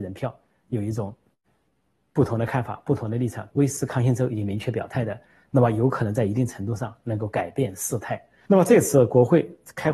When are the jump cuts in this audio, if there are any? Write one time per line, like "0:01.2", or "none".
0:03.5
0:08.5